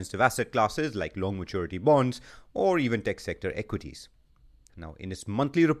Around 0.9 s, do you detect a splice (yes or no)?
no